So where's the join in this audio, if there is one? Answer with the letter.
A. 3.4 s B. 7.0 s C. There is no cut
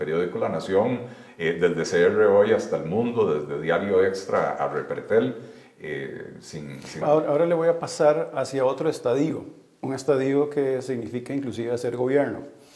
B